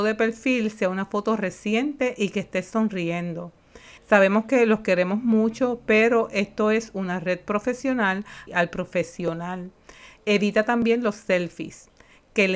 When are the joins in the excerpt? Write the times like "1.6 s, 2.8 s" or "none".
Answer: 4.0 s, 8.5 s